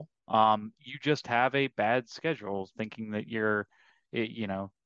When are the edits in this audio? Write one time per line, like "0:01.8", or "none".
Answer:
none